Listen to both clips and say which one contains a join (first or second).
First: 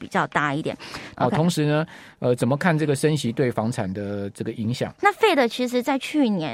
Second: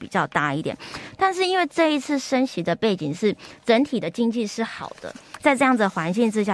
first